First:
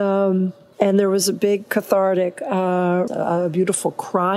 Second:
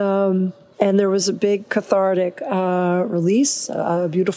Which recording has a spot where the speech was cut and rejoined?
first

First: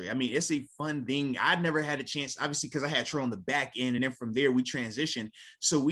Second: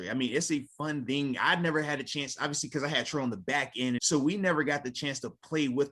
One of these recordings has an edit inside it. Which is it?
second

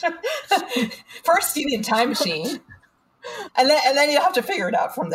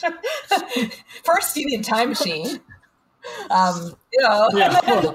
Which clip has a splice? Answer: first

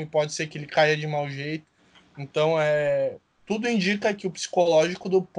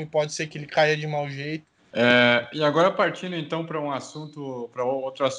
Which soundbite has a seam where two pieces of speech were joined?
second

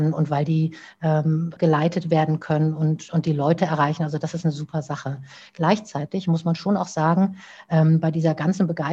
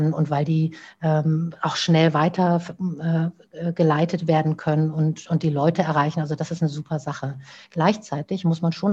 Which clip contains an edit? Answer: first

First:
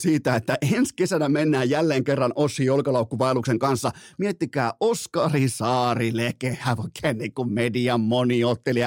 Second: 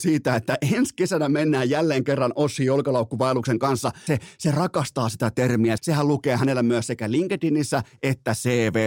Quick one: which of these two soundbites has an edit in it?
second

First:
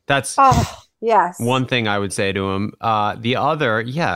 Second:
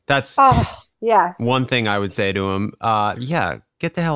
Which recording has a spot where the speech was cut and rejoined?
second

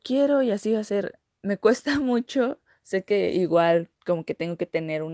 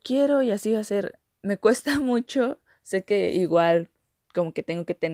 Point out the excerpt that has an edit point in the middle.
first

